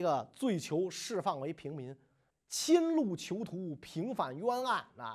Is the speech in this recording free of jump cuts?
no; 1 cut; at 2.3 s

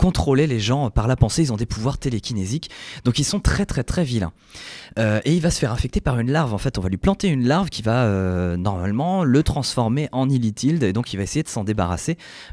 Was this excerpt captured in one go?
yes; 0 cuts

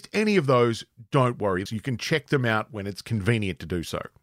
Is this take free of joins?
no; 1 cut; at 1.7 s

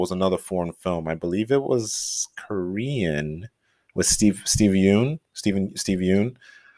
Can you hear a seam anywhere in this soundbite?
no; 0 cuts

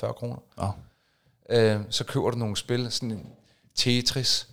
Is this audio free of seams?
yes; 0 cuts

